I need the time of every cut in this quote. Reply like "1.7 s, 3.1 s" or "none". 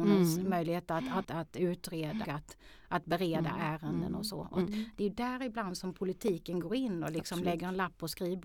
1.2 s, 2.2 s

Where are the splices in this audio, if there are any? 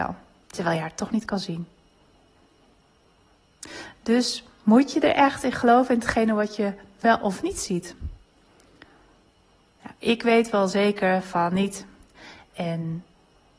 none

